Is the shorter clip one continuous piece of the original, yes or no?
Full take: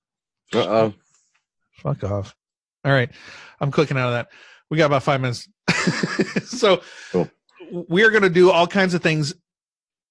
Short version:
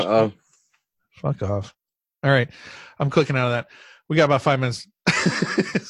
yes